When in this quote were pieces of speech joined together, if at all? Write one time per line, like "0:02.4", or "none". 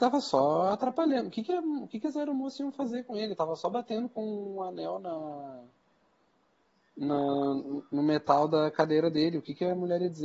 none